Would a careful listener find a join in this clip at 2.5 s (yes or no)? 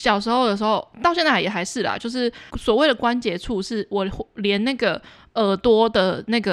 yes